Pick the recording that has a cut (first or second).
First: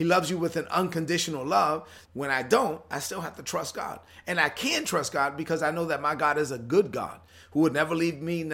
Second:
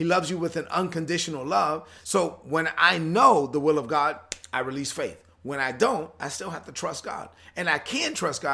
first